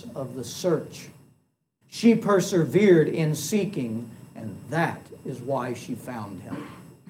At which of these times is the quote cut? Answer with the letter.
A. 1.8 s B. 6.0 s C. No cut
A